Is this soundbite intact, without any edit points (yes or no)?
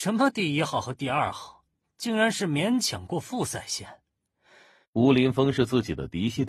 no